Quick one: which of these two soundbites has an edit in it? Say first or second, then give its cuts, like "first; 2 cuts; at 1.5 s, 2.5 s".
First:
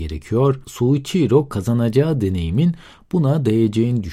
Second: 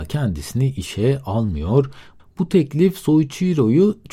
second; 1 cut; at 2.2 s